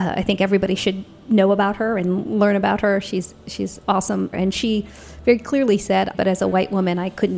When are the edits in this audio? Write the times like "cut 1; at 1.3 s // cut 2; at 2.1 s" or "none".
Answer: cut 1; at 4.3 s // cut 2; at 6.1 s